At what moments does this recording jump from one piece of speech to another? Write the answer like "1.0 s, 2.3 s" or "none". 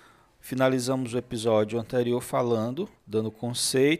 3.0 s